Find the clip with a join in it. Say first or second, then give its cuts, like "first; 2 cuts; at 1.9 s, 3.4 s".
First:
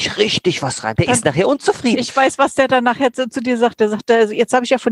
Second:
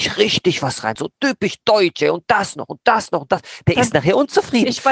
first; 1 cut; at 1.0 s